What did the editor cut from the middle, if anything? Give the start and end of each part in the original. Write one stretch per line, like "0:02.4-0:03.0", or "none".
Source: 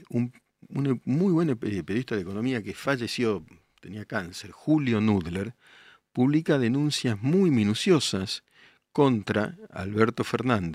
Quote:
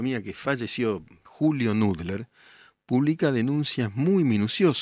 0:03.7-0:04.5